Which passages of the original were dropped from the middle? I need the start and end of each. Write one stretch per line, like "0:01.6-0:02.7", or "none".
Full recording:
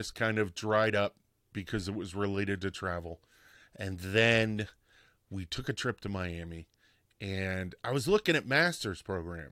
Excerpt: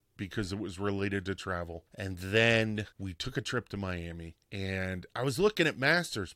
0:03.2-0:03.7
0:04.7-0:05.2
0:06.8-0:07.1